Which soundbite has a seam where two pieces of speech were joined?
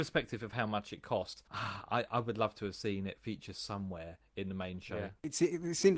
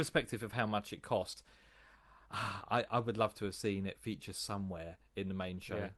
first; 1 cut; at 1.5 s

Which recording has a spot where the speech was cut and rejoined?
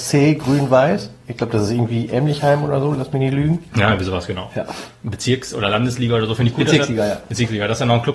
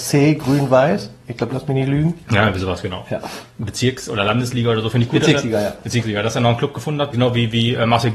second; 2 cuts; at 1.5 s, 7.1 s

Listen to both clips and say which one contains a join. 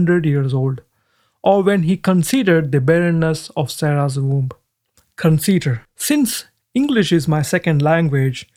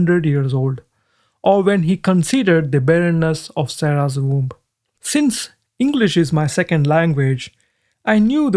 second; 1 cut; at 5.0 s

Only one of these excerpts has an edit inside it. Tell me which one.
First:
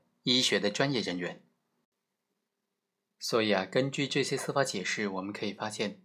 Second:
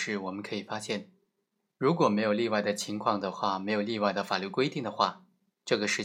second; 1 cut; at 1.7 s

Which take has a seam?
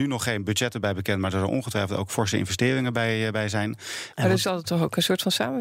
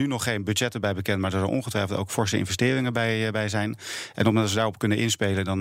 first; 1 cut; at 4.1 s

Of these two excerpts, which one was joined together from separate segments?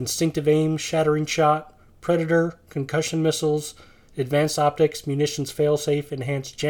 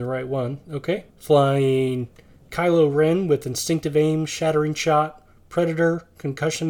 second; 1 cut; at 1.1 s

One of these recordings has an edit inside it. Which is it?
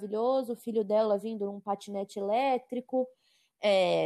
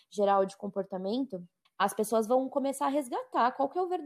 second; 1 cut; at 1.7 s

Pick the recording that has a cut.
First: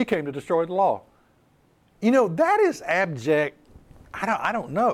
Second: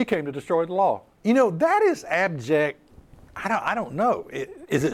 second; 1 cut; at 1.1 s

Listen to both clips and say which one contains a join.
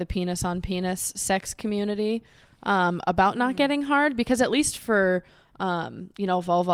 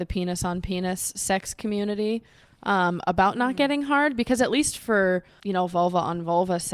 second; 1 cut; at 5.4 s

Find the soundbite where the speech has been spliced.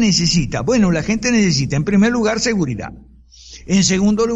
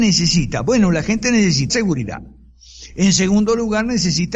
second; 1 cut; at 1.7 s

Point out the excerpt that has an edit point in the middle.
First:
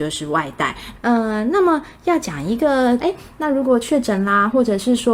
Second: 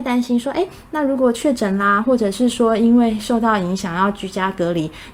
first; 2 cuts; at 1.0 s, 3.0 s

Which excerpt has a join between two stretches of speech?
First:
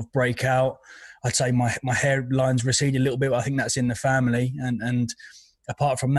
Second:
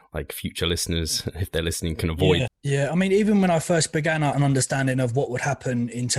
second; 2 cuts; at 2.5 s, 4.3 s

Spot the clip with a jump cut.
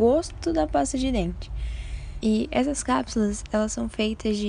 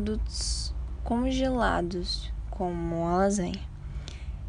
first; 1 cut; at 2.2 s

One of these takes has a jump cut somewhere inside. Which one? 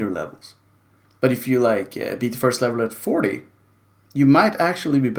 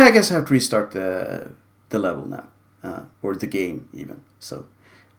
second; 1 cut; at 3.1 s

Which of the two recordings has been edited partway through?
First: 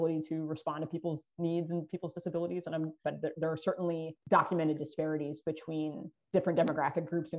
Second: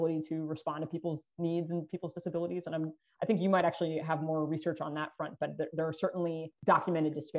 first; 1 cut; at 3.0 s

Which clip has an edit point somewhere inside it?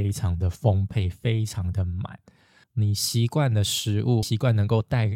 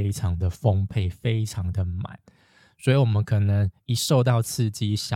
first; 2 cuts; at 2.6 s, 4.2 s

